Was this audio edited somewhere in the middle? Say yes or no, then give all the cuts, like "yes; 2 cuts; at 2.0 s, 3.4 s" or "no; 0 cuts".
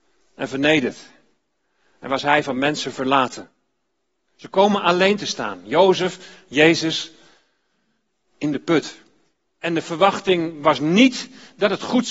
yes; 1 cut; at 9.5 s